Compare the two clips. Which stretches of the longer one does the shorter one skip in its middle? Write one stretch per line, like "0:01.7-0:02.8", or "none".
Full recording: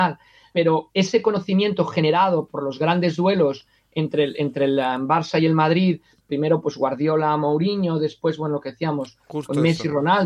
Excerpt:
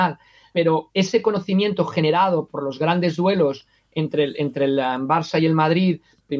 none